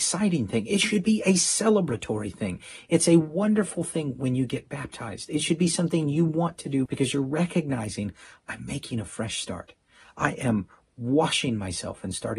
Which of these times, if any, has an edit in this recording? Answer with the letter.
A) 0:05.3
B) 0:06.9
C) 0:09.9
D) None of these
B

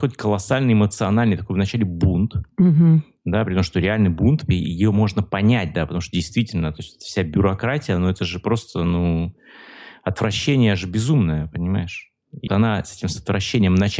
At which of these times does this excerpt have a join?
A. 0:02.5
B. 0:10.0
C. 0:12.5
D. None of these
C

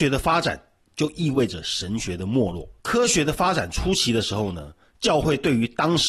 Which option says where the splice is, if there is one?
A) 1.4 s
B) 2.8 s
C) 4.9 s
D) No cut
B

